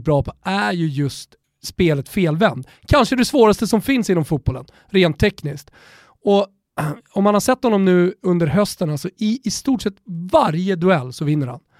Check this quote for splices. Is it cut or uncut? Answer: uncut